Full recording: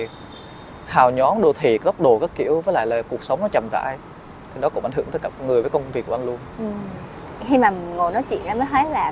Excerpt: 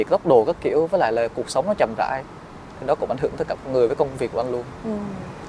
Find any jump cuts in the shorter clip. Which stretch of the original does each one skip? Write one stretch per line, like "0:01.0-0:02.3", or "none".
none